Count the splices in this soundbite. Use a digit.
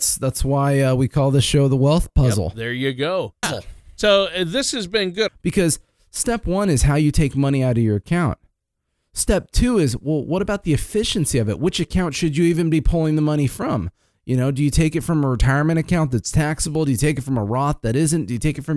2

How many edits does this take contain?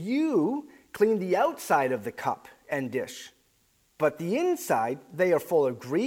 0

